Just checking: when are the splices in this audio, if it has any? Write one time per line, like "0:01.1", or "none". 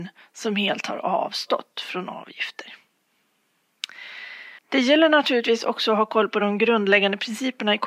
0:04.6